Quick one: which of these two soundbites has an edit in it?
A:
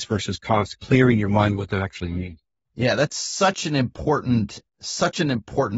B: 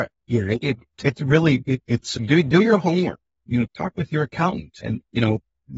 B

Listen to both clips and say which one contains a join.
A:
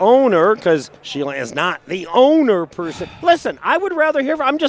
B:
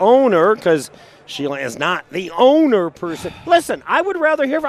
A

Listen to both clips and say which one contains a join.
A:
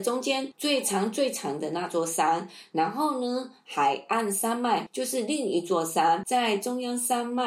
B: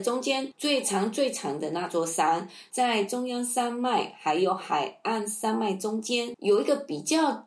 B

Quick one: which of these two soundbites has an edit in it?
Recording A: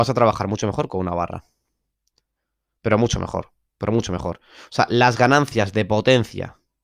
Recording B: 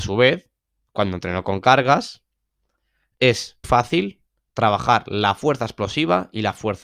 B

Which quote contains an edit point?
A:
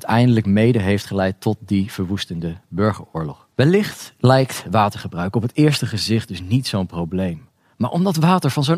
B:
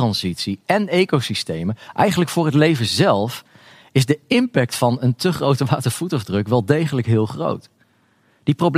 A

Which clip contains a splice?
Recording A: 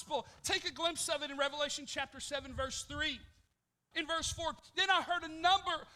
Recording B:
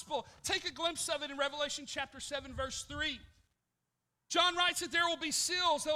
A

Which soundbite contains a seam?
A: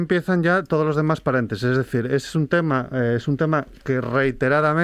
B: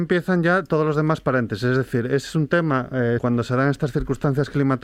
B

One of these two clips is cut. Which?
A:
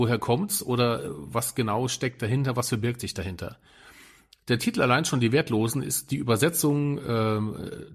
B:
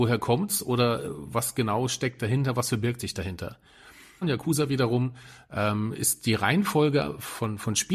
B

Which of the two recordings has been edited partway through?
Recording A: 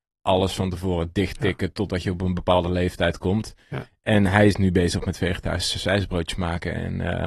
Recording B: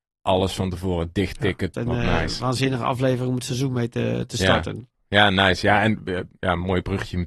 B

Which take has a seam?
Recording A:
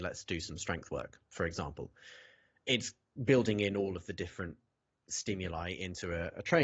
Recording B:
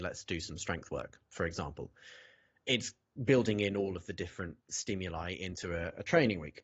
B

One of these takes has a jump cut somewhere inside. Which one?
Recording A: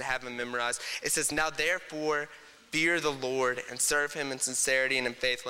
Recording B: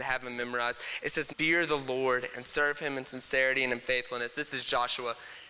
B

